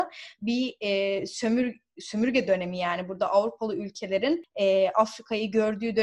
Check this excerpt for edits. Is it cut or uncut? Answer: uncut